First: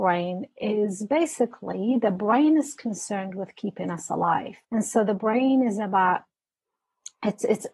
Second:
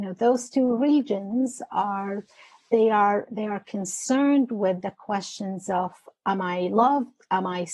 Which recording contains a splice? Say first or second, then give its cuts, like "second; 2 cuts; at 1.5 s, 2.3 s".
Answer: first; 1 cut; at 4.6 s